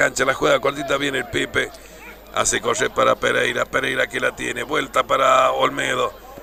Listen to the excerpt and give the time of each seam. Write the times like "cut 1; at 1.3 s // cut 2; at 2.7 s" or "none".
none